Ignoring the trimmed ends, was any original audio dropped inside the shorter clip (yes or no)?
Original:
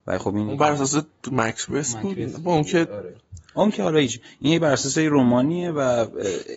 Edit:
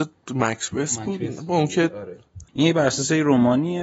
yes